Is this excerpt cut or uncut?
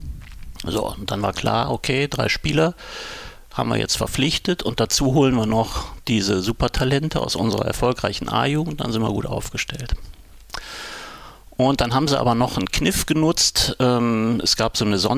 uncut